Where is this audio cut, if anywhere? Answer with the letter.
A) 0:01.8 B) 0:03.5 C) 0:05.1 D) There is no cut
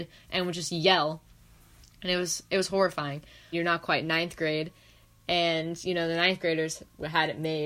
B